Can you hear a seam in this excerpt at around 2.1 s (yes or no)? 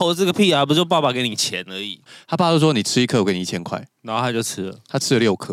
yes